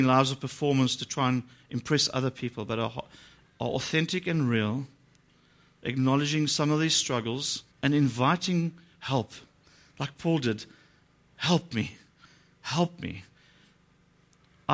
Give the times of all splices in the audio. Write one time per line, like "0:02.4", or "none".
0:03.4
0:07.7